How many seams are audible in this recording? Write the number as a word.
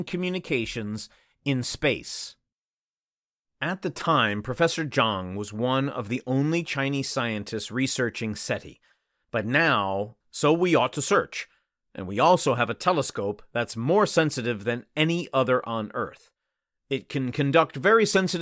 one